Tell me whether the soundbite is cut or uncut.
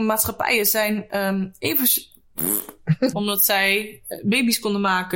cut